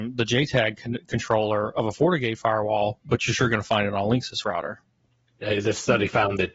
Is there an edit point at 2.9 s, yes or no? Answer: no